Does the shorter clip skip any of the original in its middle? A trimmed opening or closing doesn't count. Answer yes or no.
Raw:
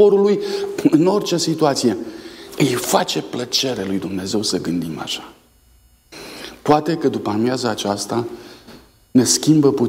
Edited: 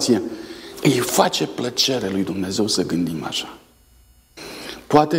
no